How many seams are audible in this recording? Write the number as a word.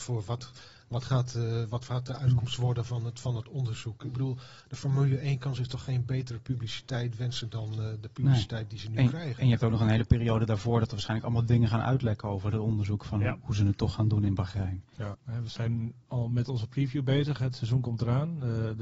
one